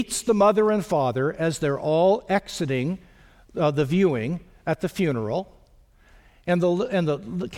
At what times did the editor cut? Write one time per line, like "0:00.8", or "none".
none

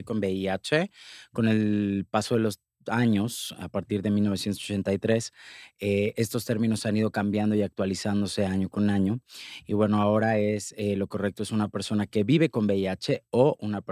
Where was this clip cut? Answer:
none

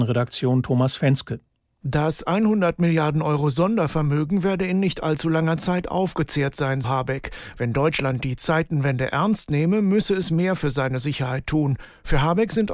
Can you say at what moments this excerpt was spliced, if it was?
0:06.8

